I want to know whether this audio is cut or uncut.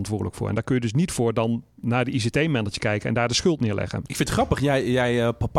uncut